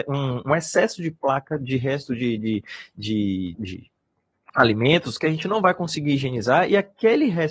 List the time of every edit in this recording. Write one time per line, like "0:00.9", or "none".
0:03.5